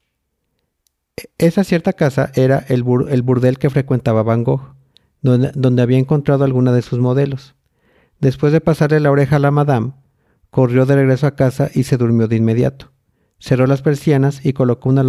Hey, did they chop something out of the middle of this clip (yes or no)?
no